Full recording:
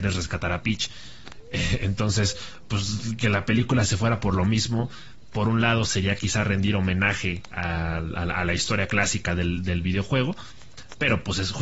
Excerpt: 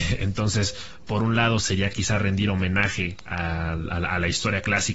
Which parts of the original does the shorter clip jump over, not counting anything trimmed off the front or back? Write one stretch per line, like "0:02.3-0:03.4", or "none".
0:02.7-0:05.3

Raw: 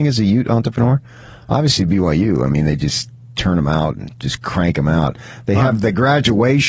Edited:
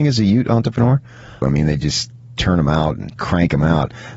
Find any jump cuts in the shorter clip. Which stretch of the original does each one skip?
0:01.4-0:02.4
0:04.2-0:04.4

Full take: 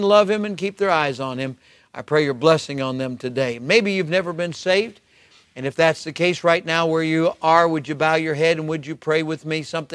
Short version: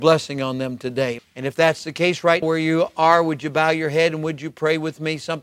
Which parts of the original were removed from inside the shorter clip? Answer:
0:03.6-0:05.4
0:06.6-0:06.9

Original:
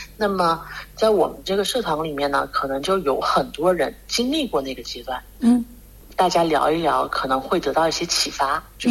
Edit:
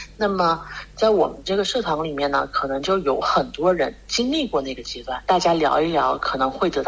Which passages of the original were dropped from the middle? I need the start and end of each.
0:05.2-0:06.1

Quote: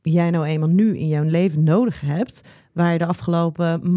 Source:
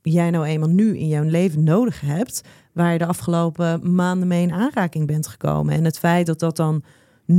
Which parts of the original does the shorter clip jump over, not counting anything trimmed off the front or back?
none

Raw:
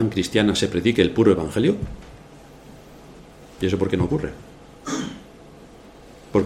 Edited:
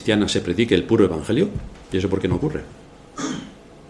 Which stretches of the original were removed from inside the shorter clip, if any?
0:02.1-0:03.5

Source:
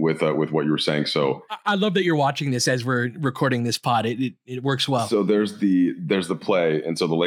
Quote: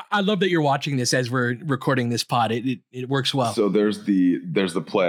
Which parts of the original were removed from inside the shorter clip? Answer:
none

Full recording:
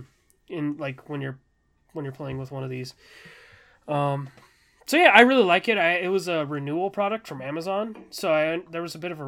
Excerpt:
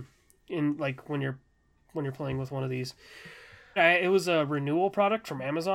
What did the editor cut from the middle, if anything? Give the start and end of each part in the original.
0:03.8-0:05.8

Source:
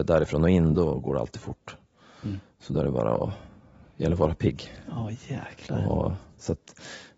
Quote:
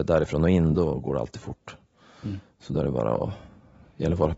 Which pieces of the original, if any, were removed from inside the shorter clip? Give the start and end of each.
none

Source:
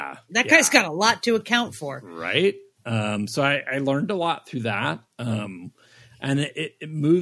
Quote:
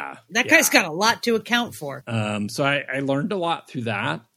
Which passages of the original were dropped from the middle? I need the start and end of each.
0:02.0-0:02.8

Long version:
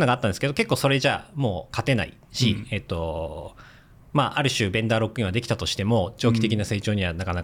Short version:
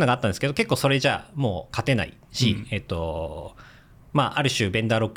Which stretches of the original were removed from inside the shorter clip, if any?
none

